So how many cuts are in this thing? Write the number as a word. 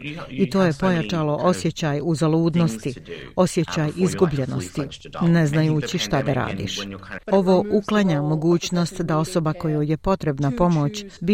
one